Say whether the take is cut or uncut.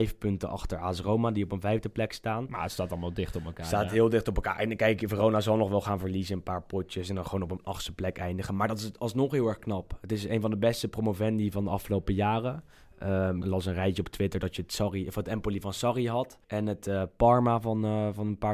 cut